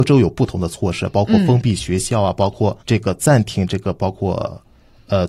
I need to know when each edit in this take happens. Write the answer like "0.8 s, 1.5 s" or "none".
2.8 s